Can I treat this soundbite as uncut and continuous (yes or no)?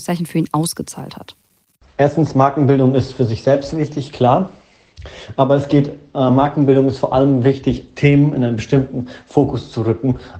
yes